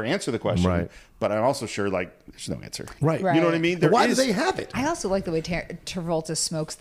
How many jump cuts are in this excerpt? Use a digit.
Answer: 2